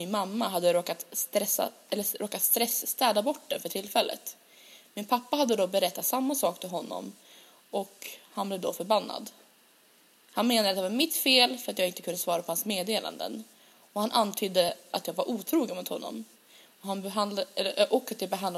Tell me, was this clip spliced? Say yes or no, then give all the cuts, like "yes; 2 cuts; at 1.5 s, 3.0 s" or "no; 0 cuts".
no; 0 cuts